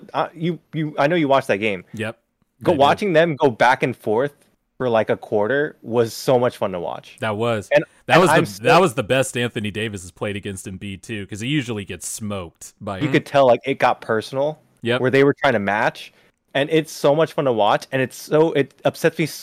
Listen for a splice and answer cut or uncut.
cut